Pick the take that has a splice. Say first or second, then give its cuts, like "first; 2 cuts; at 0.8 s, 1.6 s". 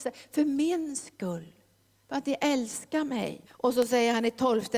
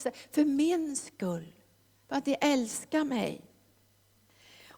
first; 1 cut; at 3.5 s